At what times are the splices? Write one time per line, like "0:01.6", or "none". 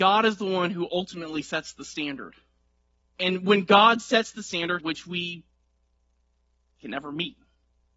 0:03.0
0:04.8